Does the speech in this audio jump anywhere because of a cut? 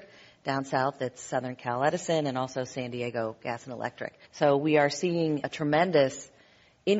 yes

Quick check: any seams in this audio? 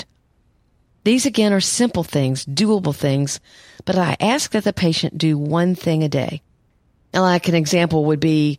no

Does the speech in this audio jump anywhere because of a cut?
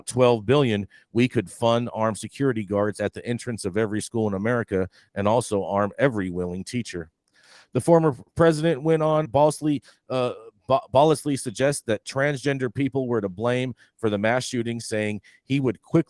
yes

